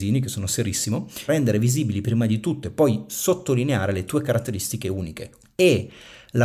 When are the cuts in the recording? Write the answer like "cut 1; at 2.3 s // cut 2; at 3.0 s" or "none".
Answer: cut 1; at 1.3 s // cut 2; at 5.4 s